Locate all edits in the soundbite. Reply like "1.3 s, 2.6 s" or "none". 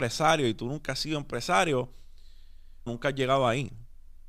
2.9 s